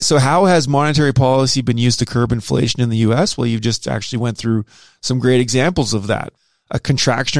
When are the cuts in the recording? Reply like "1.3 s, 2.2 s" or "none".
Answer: none